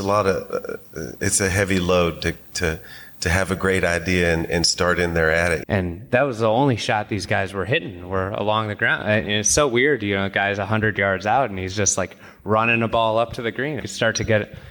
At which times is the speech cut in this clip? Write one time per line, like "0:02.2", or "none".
0:05.6
0:13.8

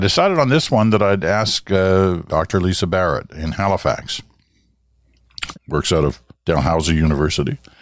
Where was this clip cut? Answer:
0:02.3
0:05.5

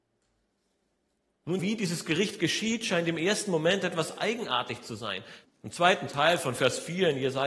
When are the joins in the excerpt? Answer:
0:01.6
0:05.4

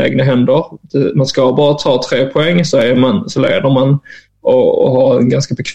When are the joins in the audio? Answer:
none

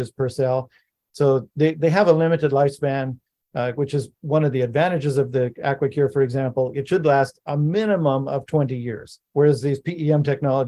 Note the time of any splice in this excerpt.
0:09.3

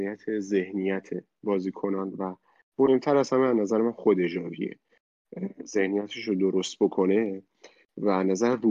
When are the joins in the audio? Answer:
none

